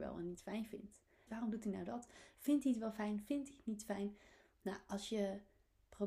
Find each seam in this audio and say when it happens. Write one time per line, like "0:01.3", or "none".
0:01.3